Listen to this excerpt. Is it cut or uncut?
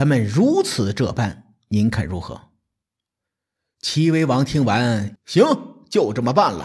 cut